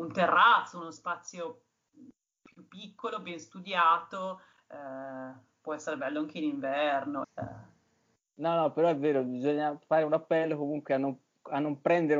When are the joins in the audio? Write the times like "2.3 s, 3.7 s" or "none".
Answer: 7.2 s